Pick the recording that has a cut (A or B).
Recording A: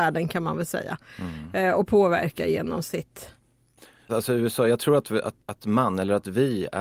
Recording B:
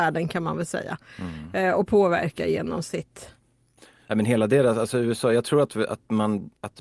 A